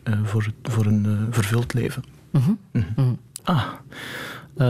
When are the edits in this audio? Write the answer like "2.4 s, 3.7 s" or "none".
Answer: 3.4 s